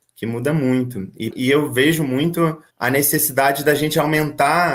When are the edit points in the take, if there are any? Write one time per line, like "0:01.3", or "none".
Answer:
0:01.3
0:02.7